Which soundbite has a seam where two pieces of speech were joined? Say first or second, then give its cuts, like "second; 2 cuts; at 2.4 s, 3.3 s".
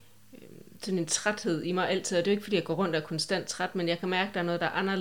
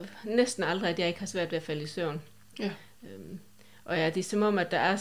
second; 1 cut; at 2.5 s